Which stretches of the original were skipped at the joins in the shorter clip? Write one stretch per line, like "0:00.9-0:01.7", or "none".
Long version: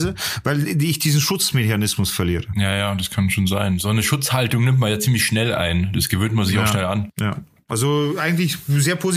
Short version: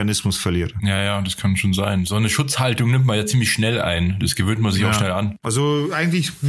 0:07.1-0:07.6